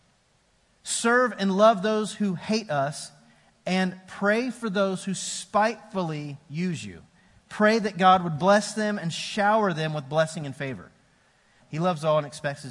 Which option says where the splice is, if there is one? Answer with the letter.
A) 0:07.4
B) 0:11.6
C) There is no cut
B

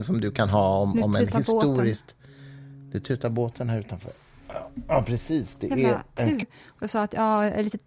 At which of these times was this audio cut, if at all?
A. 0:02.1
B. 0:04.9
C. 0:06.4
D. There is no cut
C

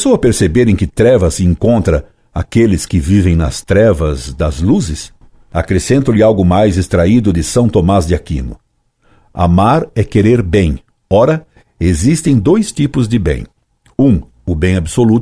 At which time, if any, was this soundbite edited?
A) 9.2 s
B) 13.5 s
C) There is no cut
C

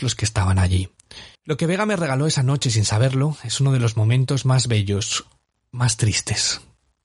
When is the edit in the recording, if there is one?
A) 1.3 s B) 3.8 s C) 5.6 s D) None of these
A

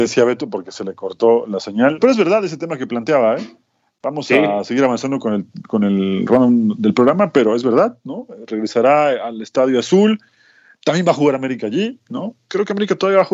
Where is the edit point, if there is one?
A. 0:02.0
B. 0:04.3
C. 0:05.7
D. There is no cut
A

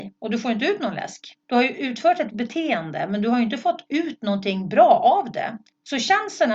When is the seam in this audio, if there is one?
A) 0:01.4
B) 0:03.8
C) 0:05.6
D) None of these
D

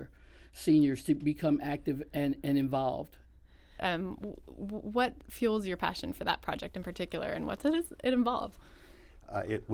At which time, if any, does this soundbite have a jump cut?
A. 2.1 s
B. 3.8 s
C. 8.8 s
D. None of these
B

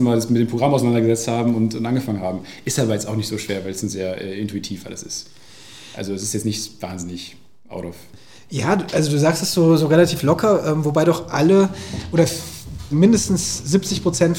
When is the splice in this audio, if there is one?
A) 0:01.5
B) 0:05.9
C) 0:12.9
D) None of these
C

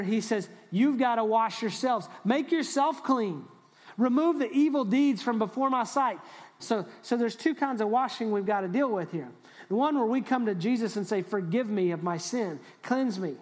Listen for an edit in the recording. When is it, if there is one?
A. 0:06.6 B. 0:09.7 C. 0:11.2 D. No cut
A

